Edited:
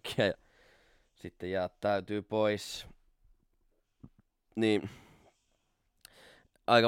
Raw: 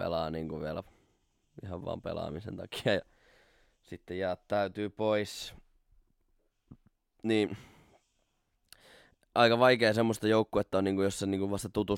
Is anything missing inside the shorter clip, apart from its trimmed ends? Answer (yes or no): no